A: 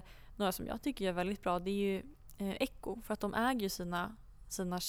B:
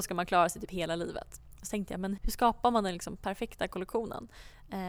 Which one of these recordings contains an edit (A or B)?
B